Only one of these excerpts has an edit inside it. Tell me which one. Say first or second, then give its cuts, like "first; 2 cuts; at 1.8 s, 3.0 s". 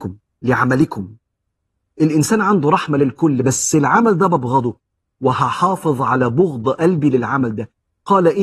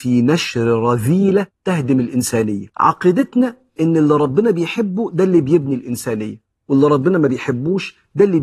second; 1 cut; at 2.7 s